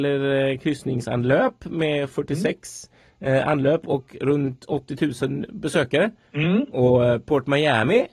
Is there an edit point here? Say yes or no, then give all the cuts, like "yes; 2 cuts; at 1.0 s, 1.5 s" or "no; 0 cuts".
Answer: yes; 1 cut; at 6.3 s